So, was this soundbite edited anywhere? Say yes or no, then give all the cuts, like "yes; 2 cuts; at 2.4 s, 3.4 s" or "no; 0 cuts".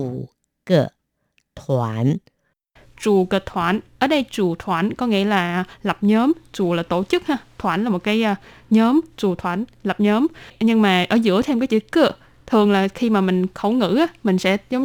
no; 0 cuts